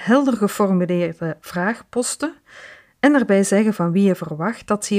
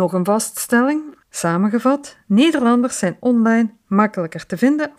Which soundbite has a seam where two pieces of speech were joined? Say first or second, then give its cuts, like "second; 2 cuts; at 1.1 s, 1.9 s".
second; 1 cut; at 1.2 s